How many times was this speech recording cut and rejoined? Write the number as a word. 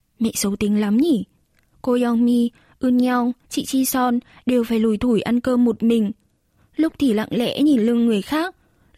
one